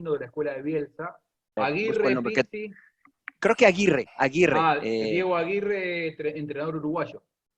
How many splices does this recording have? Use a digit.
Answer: 1